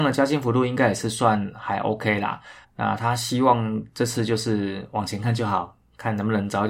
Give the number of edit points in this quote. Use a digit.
1